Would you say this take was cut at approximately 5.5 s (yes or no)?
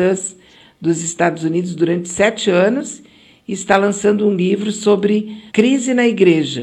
yes